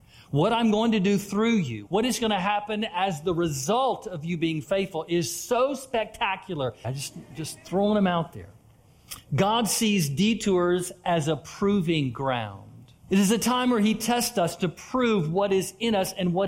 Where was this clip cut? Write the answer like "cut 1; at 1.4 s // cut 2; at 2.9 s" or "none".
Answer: cut 1; at 1.9 s // cut 2; at 6.8 s // cut 3; at 13.0 s